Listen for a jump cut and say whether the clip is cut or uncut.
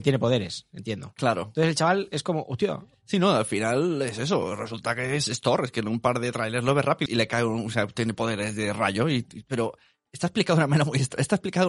cut